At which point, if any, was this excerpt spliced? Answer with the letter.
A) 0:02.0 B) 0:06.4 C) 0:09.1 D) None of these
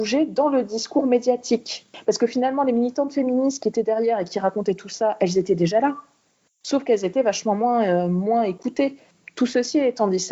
D